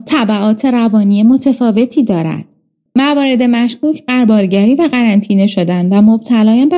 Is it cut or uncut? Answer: cut